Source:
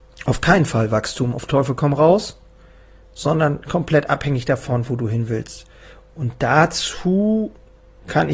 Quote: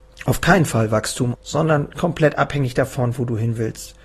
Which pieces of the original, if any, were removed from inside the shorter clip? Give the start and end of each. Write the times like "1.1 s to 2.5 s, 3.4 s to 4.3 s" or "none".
1.3 s to 3.0 s